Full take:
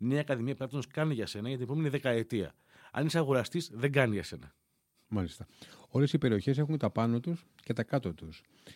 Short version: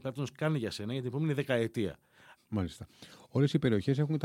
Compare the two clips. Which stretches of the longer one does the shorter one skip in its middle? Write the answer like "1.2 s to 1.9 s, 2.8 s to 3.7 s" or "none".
2.9 s to 4.9 s